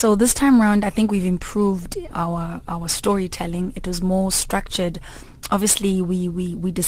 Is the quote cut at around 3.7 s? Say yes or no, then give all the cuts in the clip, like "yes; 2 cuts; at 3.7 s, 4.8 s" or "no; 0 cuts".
no; 1 cut; at 2.1 s